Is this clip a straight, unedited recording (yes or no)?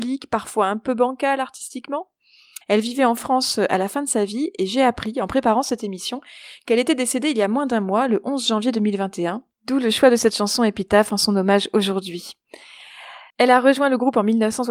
no